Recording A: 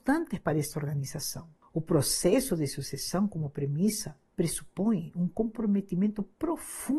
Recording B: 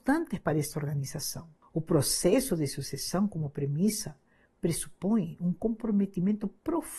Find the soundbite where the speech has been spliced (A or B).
A